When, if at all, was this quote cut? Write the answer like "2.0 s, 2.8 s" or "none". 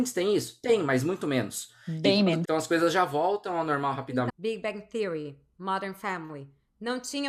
2.4 s, 4.3 s